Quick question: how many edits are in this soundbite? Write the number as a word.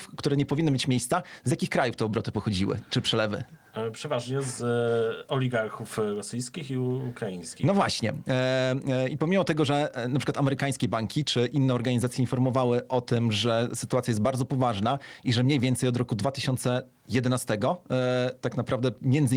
zero